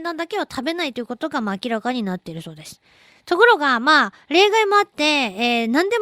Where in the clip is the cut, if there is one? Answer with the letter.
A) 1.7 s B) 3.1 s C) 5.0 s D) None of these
B